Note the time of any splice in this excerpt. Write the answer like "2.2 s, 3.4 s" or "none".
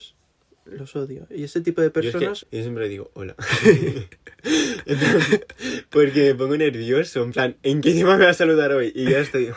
2.4 s